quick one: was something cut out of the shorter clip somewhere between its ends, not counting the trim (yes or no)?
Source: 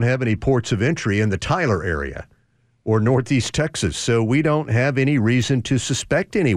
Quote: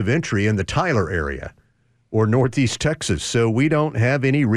no